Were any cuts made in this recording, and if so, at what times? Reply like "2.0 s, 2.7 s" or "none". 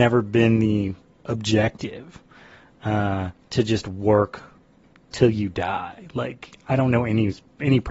none